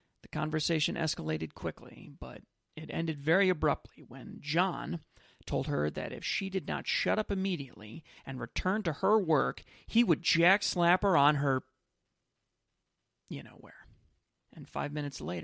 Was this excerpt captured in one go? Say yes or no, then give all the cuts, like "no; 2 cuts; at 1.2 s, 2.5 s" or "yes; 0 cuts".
no; 1 cut; at 14.3 s